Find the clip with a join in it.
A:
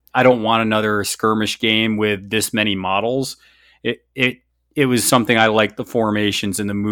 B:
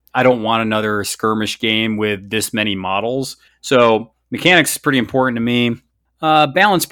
B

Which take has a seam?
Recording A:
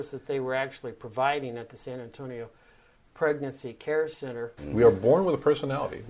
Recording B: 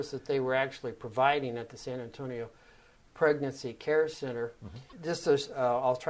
A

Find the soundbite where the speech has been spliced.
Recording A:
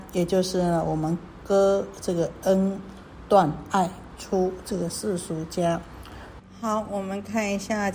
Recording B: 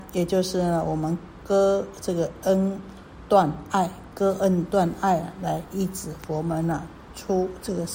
A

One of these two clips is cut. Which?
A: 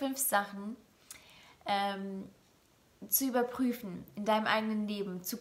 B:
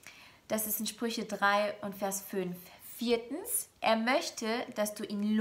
B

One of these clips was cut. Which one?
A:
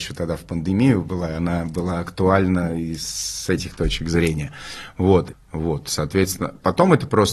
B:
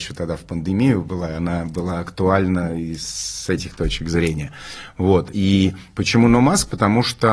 A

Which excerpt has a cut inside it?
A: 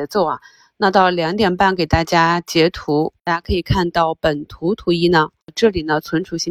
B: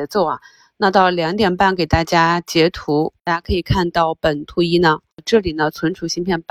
B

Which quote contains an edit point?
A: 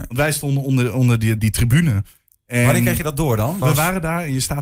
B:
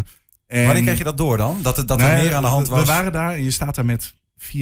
A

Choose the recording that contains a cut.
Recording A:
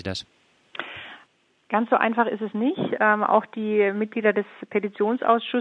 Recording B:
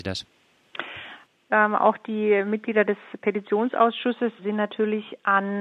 B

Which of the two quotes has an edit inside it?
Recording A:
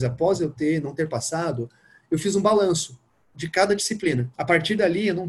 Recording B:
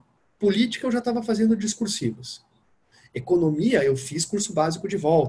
A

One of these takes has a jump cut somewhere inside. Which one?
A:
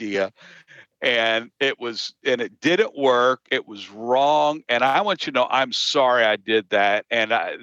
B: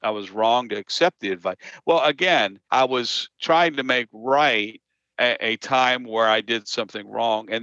B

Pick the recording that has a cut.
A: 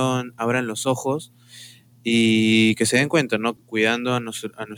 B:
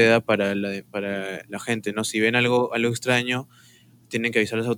A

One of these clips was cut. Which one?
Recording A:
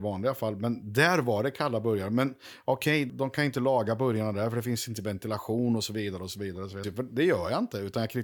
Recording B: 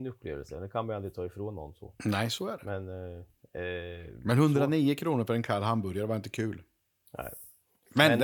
A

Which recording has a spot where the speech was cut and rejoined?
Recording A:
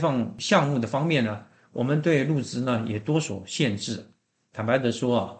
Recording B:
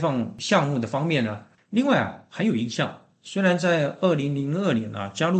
B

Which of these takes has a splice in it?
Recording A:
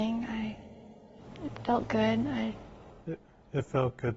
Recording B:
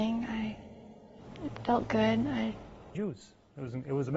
B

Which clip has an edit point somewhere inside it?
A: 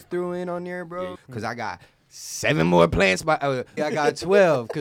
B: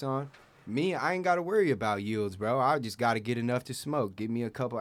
A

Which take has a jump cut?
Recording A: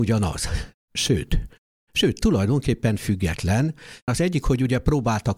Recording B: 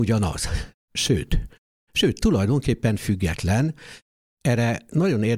A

